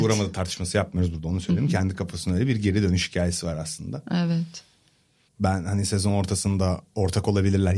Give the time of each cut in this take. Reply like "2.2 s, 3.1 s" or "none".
5.3 s